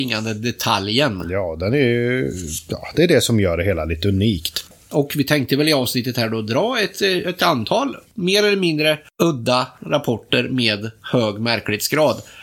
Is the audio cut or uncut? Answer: uncut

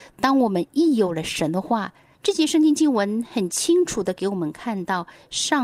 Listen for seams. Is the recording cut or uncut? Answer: cut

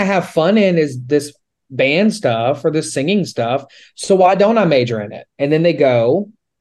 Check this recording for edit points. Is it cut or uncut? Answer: cut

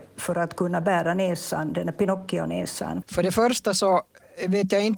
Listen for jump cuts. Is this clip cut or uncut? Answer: cut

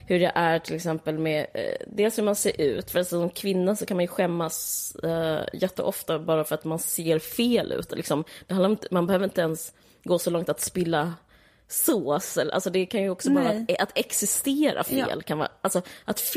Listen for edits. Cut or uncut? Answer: uncut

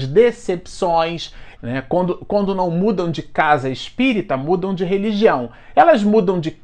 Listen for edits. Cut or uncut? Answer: cut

